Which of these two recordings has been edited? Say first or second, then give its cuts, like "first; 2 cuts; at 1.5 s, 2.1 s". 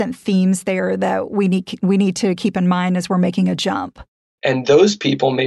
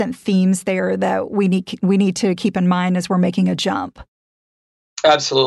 first; 1 cut; at 4.4 s